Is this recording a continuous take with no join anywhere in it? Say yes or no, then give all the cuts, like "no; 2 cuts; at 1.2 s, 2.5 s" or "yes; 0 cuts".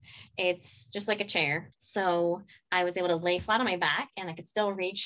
no; 1 cut; at 1.7 s